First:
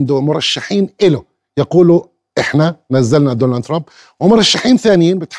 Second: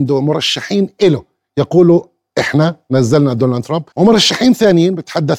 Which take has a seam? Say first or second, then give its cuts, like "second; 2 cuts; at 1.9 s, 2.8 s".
second; 1 cut; at 3.9 s